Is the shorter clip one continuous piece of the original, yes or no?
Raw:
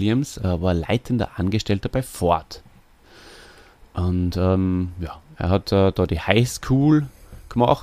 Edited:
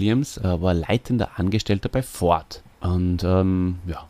no